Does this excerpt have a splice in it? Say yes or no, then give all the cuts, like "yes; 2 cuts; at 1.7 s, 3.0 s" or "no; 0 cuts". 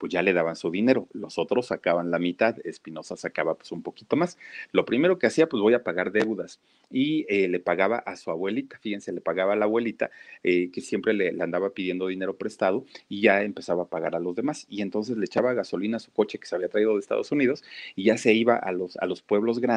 no; 0 cuts